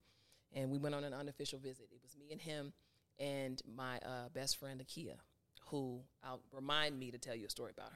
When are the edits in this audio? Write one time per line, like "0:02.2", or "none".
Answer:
none